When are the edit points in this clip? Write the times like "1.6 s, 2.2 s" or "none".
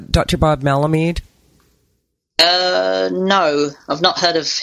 none

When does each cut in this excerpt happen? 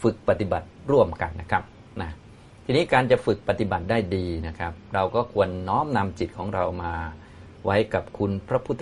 1.3 s

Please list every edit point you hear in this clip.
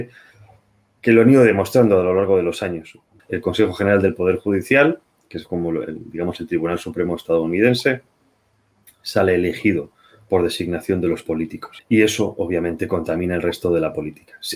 3.2 s, 11.8 s

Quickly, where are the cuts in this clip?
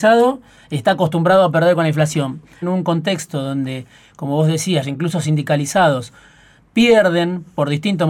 2.6 s, 4.8 s

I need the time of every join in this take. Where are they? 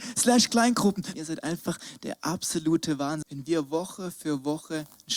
1.1 s, 3.2 s

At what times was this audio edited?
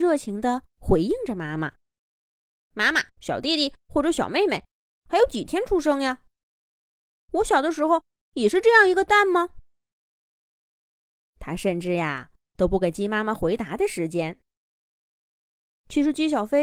1.8 s, 3.1 s

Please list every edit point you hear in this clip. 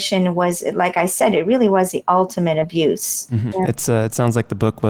3.5 s

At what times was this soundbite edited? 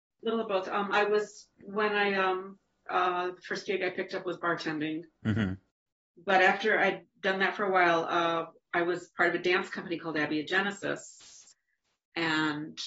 2.9 s

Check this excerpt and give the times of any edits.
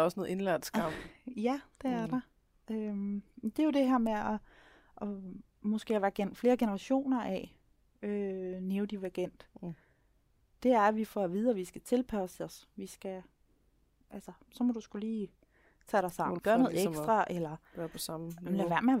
14.5 s, 16.4 s

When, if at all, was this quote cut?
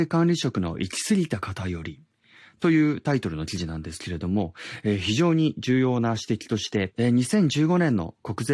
none

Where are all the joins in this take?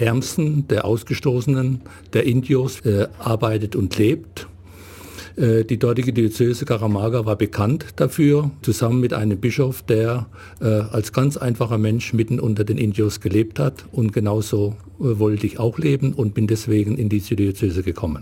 2.8 s, 8.6 s

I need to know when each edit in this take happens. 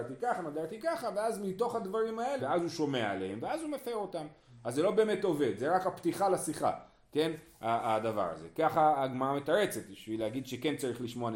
2.4 s

